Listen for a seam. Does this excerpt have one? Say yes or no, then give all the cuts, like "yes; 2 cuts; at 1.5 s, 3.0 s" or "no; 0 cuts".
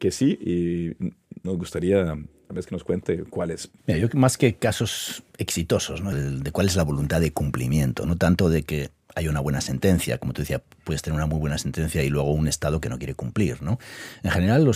yes; 2 cuts; at 3.8 s, 6.1 s